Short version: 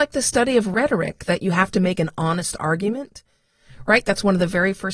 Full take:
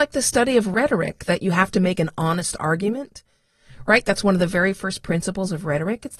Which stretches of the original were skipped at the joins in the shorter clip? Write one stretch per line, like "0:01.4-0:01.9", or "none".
none